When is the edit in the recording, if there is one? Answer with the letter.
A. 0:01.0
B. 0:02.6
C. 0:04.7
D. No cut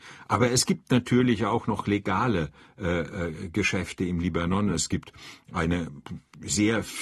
D